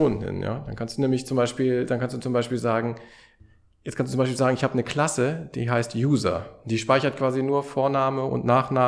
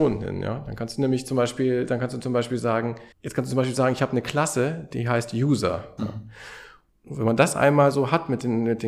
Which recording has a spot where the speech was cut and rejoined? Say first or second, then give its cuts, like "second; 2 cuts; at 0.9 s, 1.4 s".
second; 2 cuts; at 3.1 s, 6.0 s